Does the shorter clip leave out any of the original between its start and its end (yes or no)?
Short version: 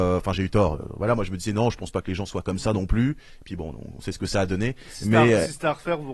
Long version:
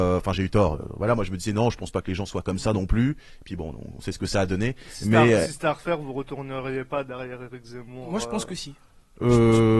no